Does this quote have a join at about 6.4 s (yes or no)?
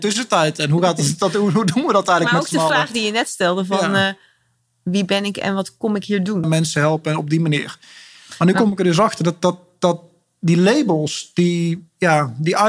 yes